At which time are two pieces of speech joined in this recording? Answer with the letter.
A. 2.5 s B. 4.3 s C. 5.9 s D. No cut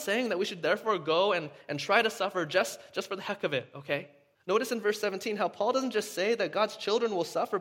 B